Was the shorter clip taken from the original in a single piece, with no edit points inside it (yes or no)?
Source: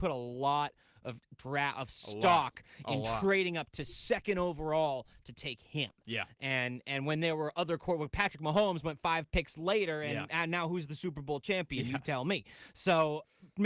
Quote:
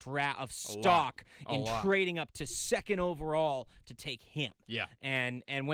yes